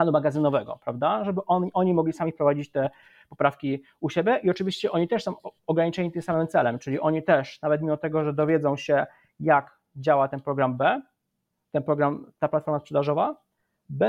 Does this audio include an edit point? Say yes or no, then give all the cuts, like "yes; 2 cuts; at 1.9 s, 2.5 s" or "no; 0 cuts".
no; 0 cuts